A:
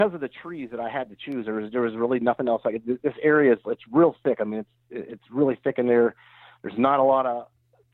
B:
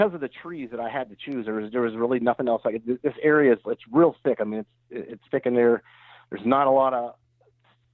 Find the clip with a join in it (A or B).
B